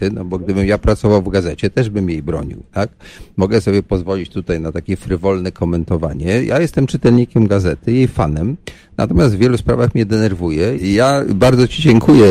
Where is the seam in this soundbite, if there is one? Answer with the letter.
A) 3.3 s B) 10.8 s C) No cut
B